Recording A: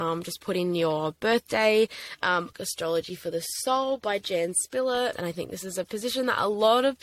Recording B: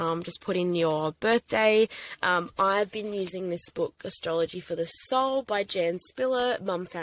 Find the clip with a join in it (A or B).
A